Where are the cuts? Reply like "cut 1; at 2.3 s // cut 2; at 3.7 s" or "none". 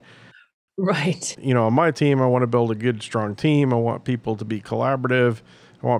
cut 1; at 1.3 s